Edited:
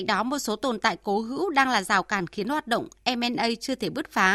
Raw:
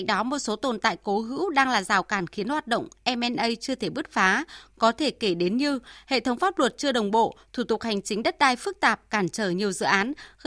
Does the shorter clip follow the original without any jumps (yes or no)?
yes